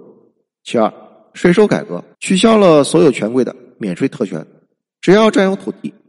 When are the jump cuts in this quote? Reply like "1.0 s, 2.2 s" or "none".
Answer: 2.1 s, 4.9 s